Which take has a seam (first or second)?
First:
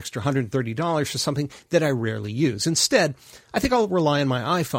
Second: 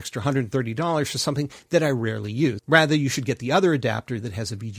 second